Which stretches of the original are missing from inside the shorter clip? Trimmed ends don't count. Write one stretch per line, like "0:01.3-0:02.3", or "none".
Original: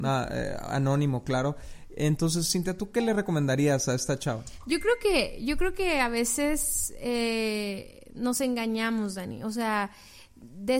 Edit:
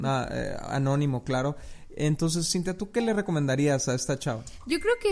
none